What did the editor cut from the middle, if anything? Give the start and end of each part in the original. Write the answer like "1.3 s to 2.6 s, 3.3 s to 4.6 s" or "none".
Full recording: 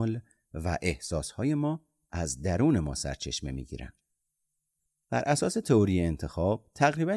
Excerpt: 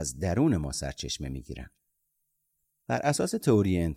none